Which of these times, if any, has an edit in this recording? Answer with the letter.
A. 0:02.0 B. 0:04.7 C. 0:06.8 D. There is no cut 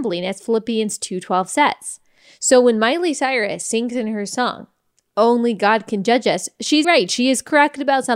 C